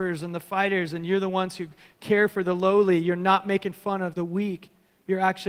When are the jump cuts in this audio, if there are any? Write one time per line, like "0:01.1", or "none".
0:04.1